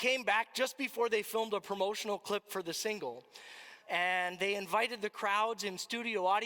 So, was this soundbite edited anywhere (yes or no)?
yes